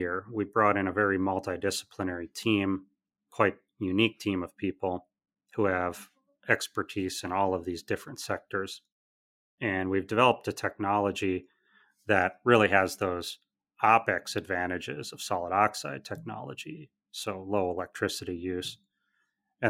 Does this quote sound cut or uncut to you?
uncut